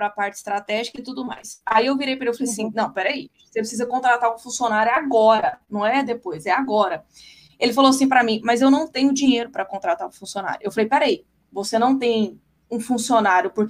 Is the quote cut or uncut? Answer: uncut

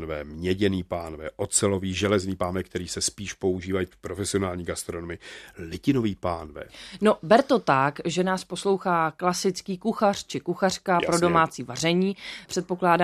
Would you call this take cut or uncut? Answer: uncut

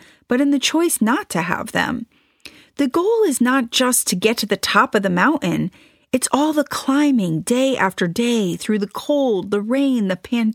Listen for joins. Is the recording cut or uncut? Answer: uncut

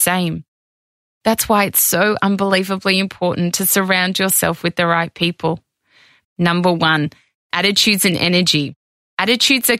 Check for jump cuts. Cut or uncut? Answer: cut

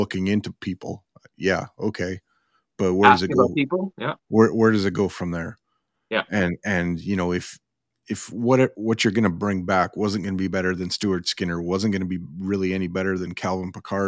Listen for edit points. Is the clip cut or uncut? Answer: uncut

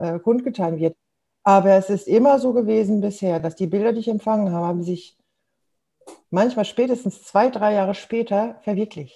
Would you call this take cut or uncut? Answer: uncut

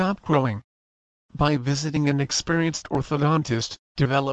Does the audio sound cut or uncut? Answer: uncut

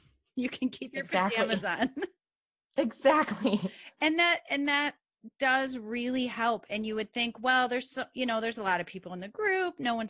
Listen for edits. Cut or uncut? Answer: uncut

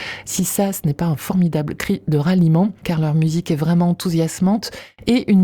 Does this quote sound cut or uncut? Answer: cut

